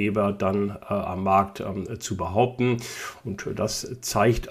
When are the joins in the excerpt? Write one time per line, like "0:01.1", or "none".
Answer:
0:03.2

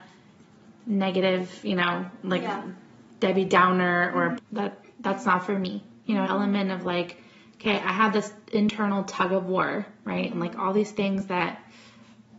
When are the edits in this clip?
0:04.4
0:06.2

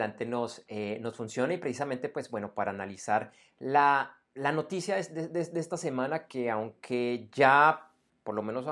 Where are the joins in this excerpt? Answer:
none

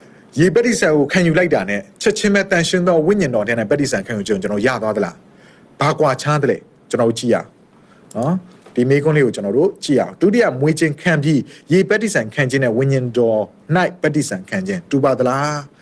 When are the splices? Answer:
none

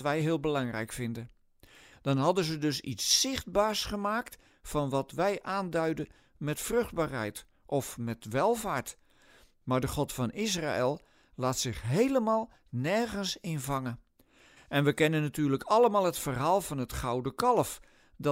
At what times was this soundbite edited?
0:01.9
0:14.6

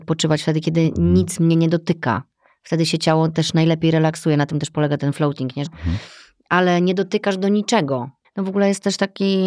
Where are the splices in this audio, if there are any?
0:05.7
0:08.2

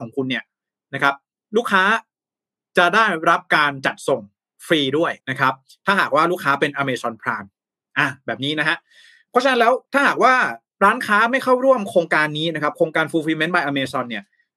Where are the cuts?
0:05.2
0:09.8

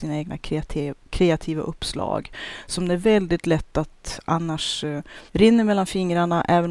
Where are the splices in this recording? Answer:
0:05.3

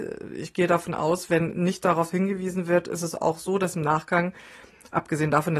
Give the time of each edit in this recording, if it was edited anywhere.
none

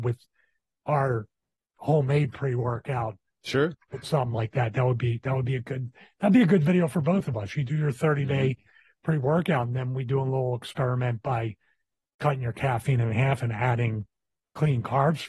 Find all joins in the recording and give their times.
none

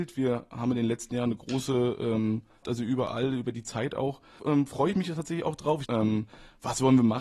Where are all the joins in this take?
0:02.6
0:04.4
0:05.8

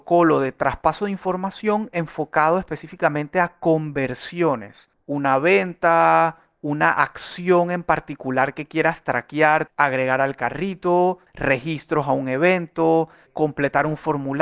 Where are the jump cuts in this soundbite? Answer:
0:04.9
0:09.7
0:11.3

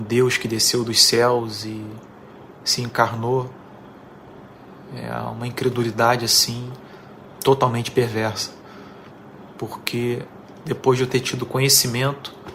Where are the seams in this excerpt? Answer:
0:09.5

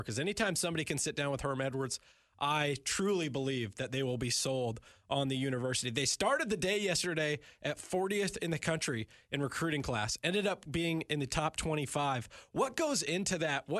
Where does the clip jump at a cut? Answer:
none

